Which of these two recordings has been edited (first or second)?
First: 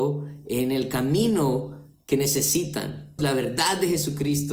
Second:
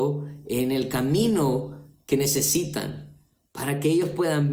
first